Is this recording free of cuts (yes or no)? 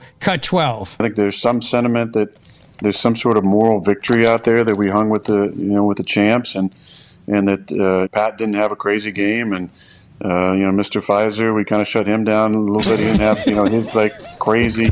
no